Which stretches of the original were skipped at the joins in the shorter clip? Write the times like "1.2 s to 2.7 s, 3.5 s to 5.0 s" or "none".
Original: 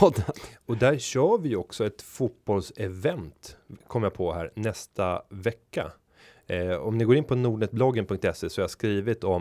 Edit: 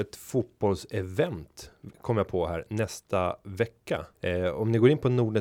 6.0 s to 6.4 s